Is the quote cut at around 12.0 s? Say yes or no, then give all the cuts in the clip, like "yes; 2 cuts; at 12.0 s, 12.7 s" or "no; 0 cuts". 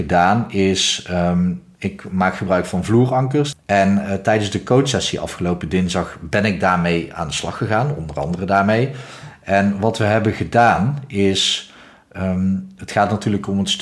no; 1 cut; at 3.5 s